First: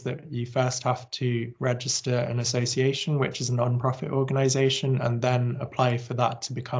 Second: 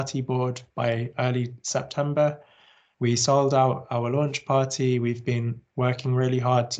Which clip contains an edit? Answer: second; 1 cut; at 2.9 s

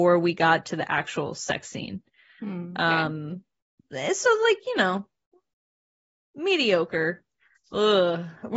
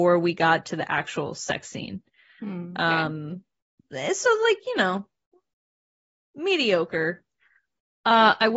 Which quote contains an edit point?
first; 1 cut; at 7.6 s

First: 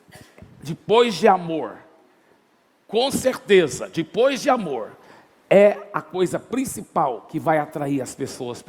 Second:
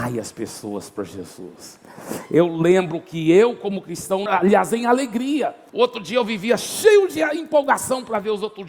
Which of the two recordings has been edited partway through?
second; 2 cuts; at 4.3 s, 5.7 s

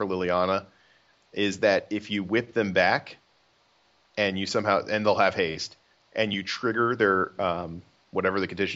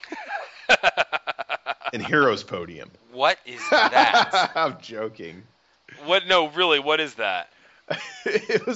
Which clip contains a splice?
second; 1 cut; at 3.0 s

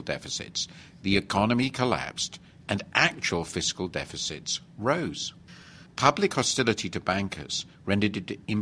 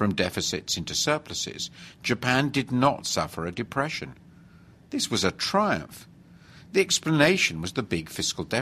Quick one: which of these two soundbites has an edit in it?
first; 1 cut; at 5.9 s

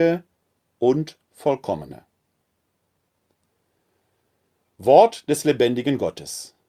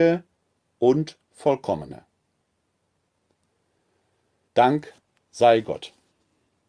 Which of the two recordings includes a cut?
second; 1 cut; at 4.5 s

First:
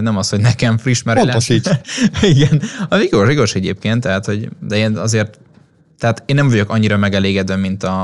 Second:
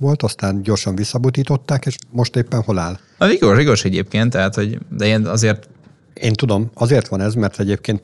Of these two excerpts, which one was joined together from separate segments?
second; 2 cuts; at 3.2 s, 6.1 s

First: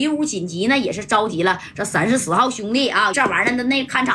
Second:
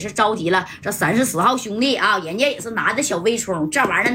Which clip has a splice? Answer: first; 1 cut; at 3.1 s

